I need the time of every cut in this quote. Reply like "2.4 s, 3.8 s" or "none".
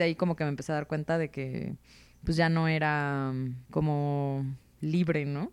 3.7 s